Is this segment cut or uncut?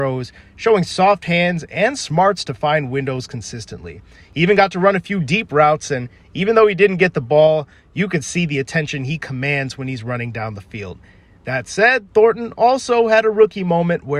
uncut